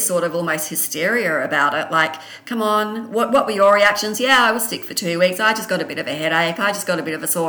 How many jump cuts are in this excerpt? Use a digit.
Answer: 0